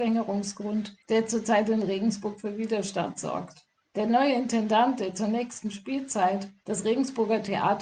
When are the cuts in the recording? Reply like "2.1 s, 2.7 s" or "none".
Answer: 1.0 s